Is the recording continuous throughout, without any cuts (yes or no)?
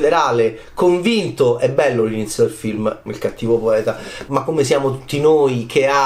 no